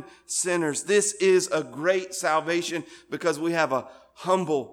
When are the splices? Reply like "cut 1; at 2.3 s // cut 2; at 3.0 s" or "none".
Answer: none